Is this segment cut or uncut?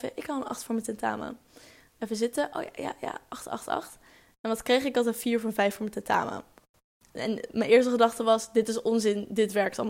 uncut